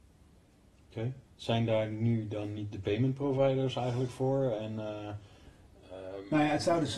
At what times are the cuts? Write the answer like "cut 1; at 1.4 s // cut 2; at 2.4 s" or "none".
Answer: cut 1; at 1.3 s